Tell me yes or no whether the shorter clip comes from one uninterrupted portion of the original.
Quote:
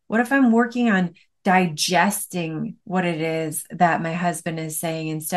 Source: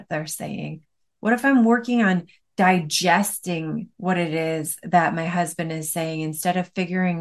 yes